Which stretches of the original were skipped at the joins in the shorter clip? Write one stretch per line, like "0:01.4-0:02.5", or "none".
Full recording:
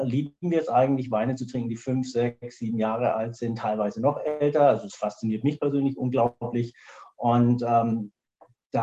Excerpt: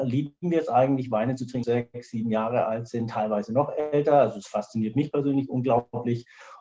0:01.6-0:02.1